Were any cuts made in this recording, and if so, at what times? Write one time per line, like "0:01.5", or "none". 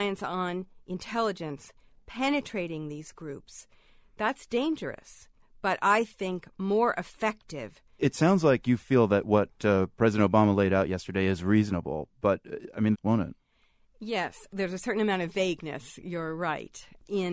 0:12.9